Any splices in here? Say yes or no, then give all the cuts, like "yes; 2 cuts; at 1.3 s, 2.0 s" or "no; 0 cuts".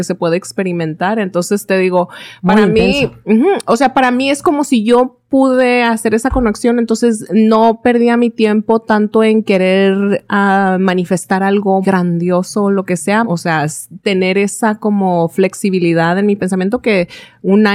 yes; 2 cuts; at 11.8 s, 13.2 s